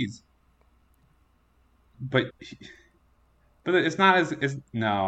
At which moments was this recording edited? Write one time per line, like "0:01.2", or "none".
0:01.9